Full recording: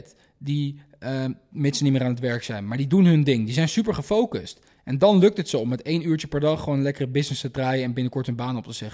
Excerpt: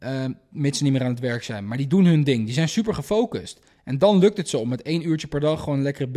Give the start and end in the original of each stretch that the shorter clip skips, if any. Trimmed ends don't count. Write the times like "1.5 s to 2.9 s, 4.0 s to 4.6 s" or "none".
none

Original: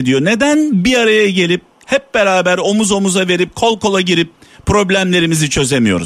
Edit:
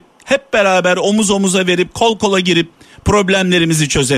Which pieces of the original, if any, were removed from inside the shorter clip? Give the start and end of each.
none

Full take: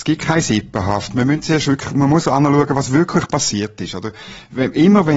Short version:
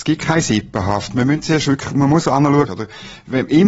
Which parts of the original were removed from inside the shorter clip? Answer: 2.7 s to 3.9 s

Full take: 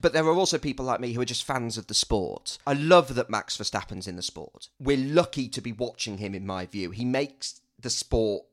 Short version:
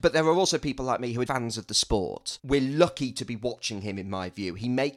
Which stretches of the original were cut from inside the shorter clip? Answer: 1.3 s to 1.5 s, 2.6 s to 4.7 s

